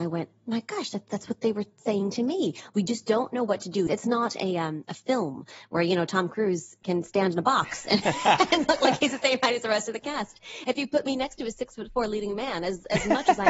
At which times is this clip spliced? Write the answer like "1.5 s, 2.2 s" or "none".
3.9 s